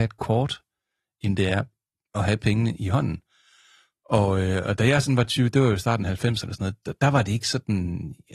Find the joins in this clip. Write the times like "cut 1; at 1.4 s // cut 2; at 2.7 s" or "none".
none